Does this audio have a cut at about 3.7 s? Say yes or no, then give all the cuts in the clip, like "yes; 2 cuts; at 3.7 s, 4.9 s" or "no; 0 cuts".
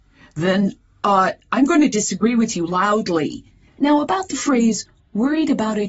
yes; 1 cut; at 3.7 s